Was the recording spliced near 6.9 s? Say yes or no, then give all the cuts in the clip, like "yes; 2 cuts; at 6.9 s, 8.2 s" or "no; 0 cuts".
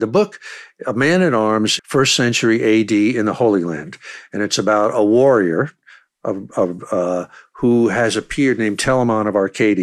no; 1 cut; at 1.8 s